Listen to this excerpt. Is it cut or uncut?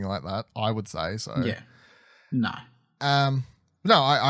uncut